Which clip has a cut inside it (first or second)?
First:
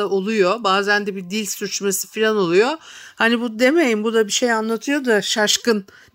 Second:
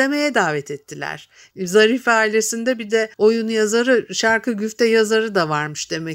second